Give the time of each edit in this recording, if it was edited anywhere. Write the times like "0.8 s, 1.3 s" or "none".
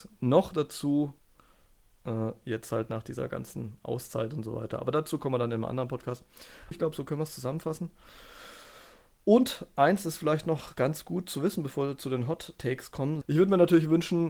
6.7 s, 13.2 s